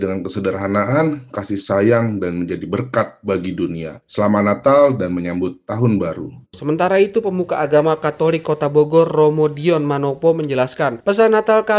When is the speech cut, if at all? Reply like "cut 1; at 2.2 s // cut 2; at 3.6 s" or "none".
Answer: none